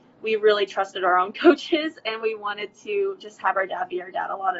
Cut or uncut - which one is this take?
uncut